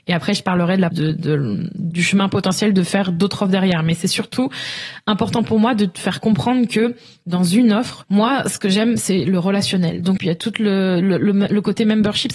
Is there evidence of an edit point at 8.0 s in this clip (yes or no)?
yes